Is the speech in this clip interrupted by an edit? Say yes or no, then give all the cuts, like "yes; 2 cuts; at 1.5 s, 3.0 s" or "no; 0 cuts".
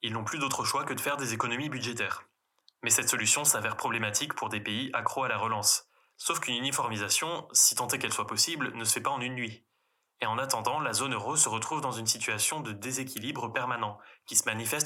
yes; 1 cut; at 6.1 s